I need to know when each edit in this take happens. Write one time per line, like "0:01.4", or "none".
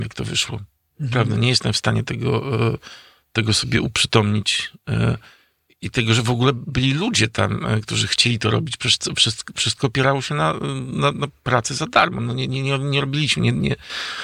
none